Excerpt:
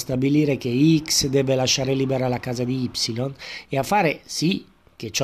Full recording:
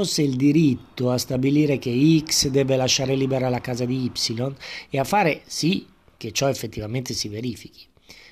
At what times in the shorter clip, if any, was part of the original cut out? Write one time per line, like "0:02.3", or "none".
none